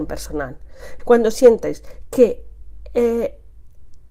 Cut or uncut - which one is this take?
cut